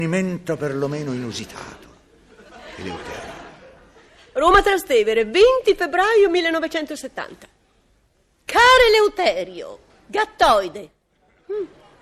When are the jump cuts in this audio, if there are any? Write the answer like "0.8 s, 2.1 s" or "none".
none